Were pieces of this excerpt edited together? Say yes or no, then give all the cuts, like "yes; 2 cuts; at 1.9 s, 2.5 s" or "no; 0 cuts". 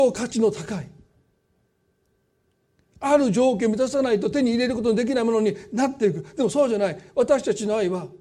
no; 0 cuts